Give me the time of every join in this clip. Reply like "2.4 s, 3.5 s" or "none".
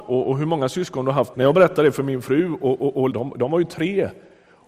1.3 s, 3.1 s